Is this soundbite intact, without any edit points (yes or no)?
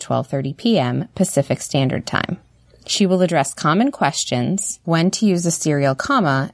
no